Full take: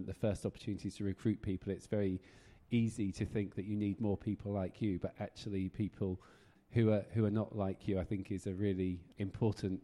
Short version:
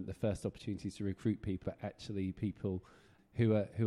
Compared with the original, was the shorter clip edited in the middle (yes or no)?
yes